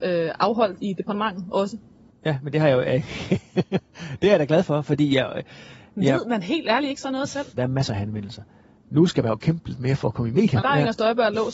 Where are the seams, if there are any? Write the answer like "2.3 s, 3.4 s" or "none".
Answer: 2.1 s, 7.6 s, 10.6 s